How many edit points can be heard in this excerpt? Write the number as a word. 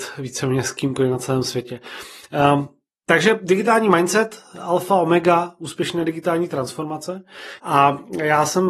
one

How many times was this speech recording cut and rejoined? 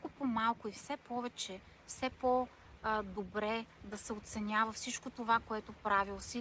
one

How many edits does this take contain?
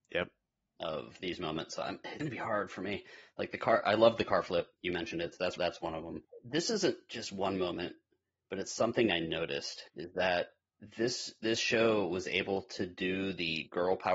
one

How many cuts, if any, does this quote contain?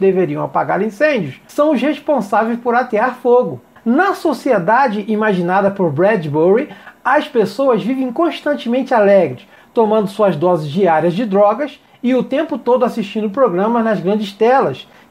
zero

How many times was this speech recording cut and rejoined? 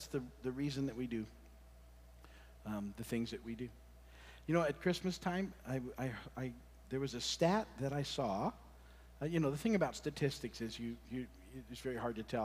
zero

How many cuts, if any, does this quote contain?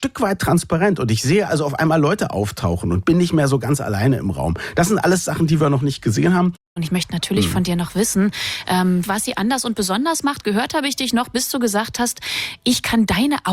one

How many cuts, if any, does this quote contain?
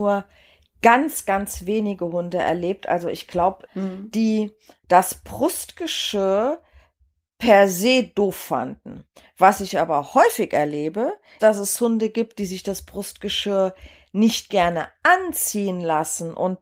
two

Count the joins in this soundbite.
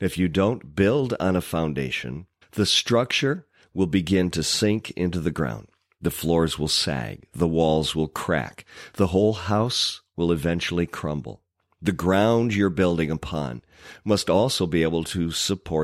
one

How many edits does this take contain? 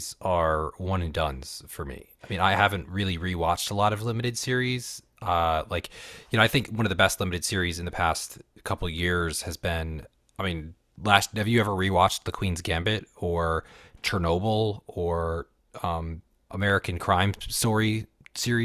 one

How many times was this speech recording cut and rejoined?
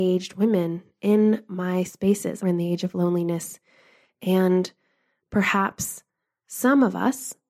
one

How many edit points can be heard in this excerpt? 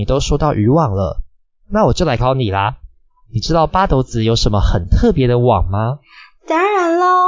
one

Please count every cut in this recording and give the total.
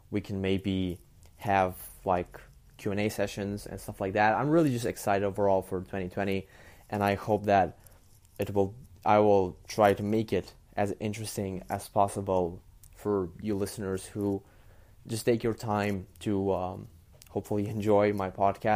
zero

